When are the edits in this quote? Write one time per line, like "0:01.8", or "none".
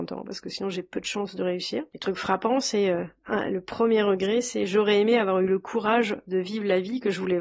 0:01.9